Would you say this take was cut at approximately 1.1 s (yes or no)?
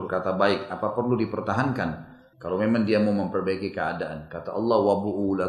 no